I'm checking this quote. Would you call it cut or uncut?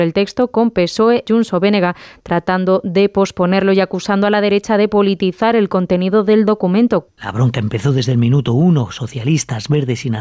cut